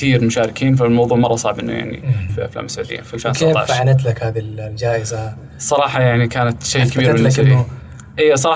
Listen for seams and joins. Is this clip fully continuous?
no; 1 cut; at 2.3 s

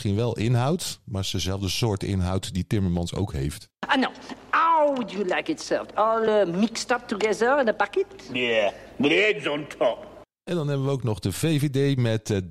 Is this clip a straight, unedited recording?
yes; 0 cuts

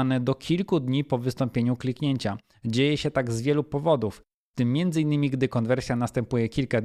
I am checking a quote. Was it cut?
no; 0 cuts

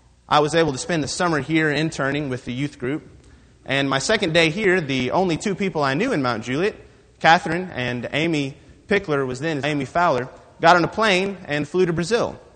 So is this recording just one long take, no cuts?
no; 1 cut; at 9.6 s

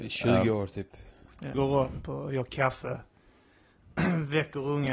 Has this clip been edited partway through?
yes; 1 cut; at 1.5 s

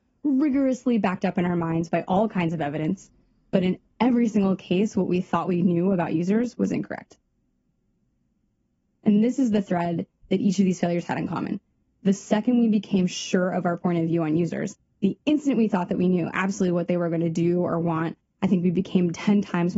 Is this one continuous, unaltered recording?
yes; 0 cuts

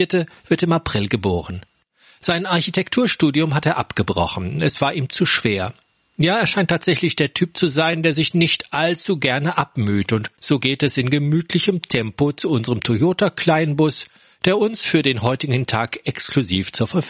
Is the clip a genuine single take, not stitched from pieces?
no; 1 cut; at 10.3 s

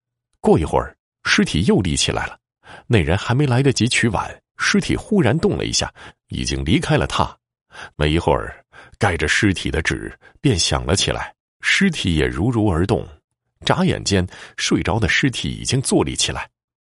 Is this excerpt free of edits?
no; 1 cut; at 7.9 s

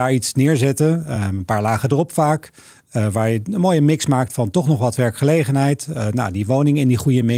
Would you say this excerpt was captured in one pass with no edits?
yes; 0 cuts

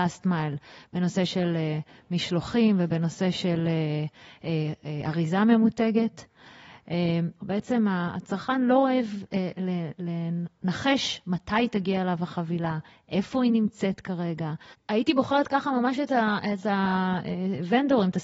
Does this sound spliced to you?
yes; 2 cuts; at 7.4 s, 14.7 s

